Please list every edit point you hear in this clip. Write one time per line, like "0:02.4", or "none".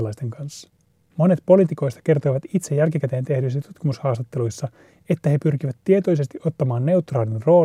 0:01.1